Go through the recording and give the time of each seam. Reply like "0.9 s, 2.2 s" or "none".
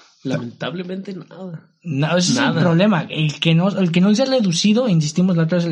none